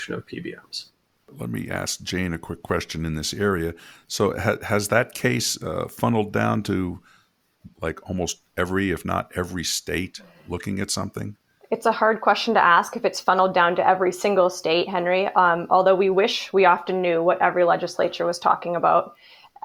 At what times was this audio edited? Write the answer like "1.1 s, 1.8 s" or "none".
none